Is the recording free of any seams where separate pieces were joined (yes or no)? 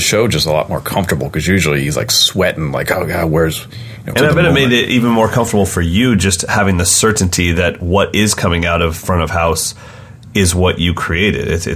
no